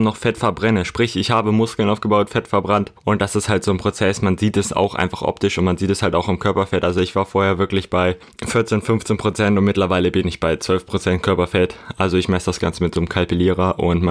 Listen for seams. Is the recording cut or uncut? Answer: uncut